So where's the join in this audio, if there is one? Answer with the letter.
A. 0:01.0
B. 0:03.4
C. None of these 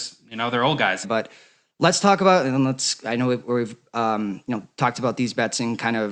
A